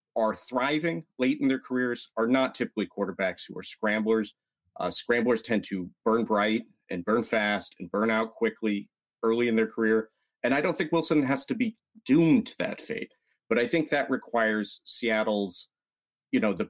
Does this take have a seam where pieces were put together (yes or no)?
no